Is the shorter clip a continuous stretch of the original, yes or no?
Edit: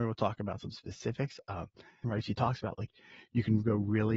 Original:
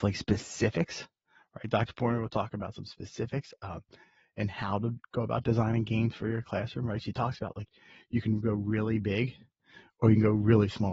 no